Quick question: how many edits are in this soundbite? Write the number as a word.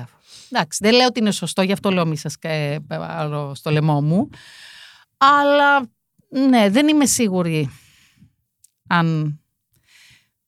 zero